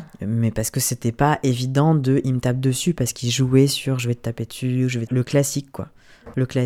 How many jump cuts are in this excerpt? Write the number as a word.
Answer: one